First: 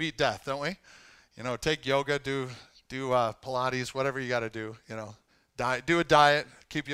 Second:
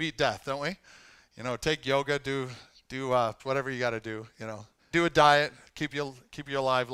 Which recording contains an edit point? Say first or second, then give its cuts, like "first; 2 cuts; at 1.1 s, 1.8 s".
second; 2 cuts; at 3.4 s, 4.9 s